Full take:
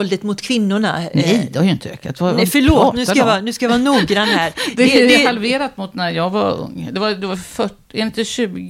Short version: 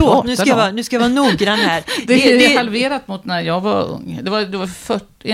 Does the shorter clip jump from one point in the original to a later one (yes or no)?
no